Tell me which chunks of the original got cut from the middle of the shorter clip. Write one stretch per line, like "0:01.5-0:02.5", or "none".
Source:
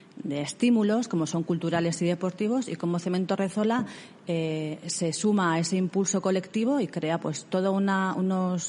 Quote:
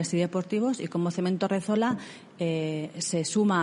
none

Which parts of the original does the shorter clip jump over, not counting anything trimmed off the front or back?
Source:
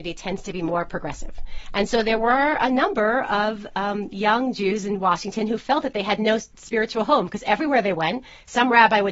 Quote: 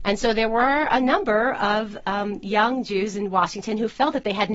none

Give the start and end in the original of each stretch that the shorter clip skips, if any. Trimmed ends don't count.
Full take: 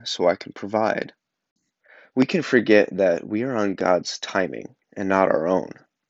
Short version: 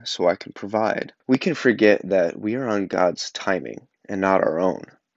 0:01.2-0:02.1

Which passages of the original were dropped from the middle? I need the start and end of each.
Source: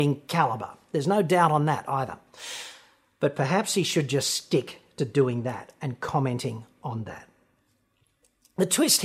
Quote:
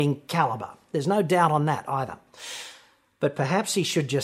none

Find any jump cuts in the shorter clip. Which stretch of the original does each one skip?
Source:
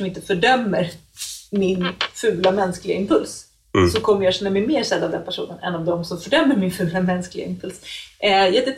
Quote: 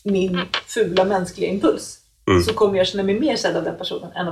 none

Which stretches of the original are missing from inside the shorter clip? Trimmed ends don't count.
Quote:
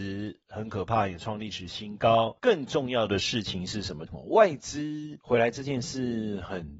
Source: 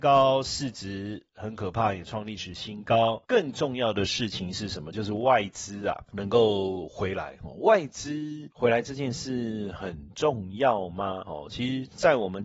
0:04.9-0:07.4

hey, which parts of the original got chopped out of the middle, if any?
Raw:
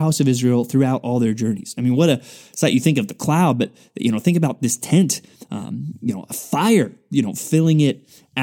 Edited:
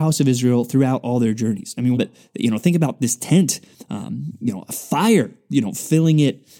0:02.0-0:03.6

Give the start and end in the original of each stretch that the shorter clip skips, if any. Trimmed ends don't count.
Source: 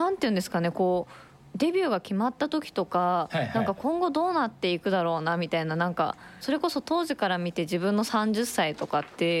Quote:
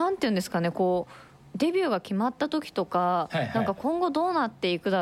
none

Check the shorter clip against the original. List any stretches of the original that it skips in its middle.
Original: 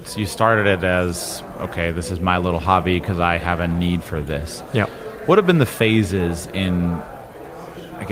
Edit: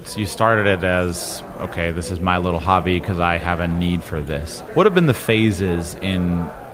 0:04.7-0:05.2

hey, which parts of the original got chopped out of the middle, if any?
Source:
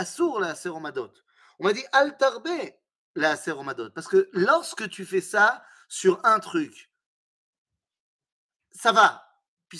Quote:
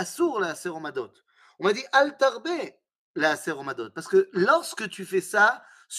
none

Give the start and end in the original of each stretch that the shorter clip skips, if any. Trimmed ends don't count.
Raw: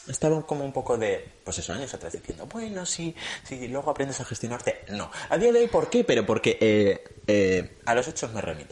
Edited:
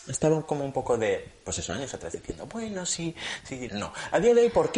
0:03.7-0:04.9

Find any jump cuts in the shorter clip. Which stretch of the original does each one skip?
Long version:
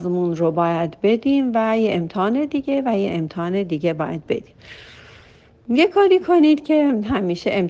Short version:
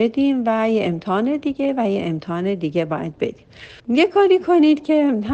0:04.9-0:05.6

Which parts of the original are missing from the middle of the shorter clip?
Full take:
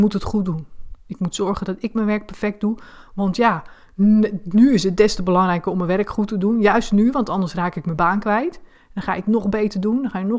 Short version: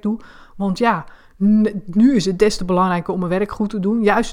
none

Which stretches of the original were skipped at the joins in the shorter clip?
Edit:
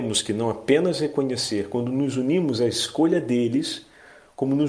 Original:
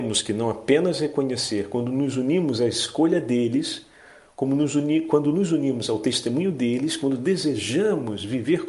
none

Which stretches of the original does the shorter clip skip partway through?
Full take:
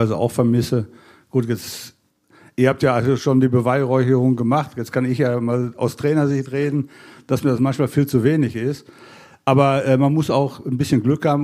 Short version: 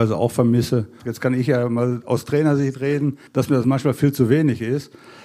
0:01.0-0:04.7
0:07.0-0:07.2

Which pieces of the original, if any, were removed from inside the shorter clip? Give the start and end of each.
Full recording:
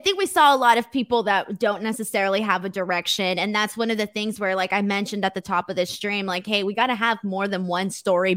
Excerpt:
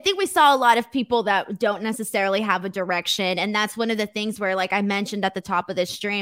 none

